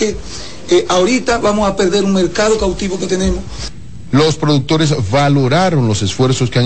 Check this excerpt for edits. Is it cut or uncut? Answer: uncut